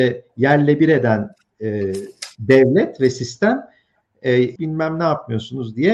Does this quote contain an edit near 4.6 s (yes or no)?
yes